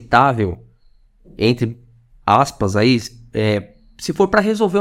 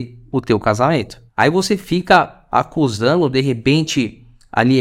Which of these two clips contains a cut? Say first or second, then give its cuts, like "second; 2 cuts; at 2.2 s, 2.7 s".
second; 1 cut; at 1.3 s